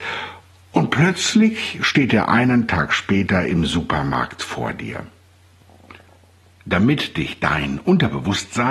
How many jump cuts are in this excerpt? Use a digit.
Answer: 0